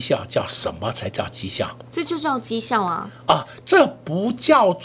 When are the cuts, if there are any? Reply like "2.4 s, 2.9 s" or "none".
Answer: none